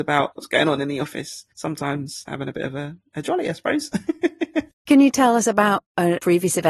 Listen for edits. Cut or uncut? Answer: uncut